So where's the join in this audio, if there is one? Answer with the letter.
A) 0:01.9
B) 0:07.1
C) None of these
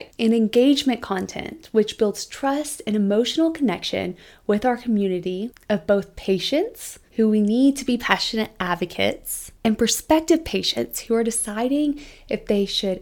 B